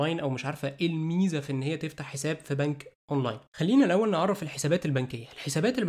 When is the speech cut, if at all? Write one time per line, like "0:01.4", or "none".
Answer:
0:03.5